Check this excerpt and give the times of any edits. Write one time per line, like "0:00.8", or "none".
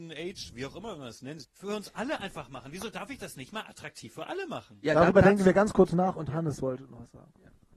0:01.4